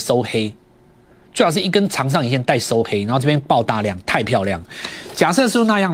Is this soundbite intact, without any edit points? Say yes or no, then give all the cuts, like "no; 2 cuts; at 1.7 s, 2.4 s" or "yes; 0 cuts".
yes; 0 cuts